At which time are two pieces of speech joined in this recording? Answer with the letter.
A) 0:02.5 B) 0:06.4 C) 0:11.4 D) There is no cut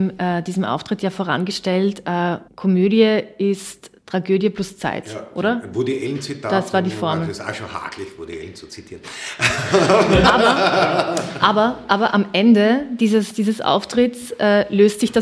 A